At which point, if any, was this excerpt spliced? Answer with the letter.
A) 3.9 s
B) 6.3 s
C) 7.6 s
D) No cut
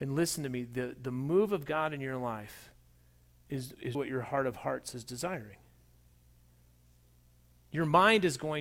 A